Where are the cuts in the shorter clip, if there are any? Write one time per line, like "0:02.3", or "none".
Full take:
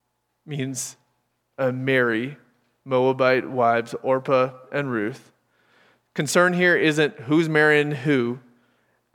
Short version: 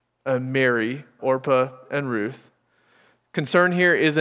0:01.2